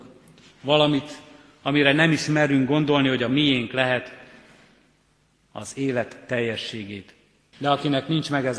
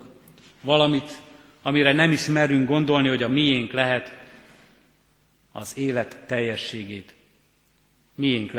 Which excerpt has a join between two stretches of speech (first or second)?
first